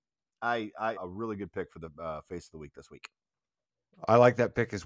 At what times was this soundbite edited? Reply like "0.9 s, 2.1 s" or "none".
1.0 s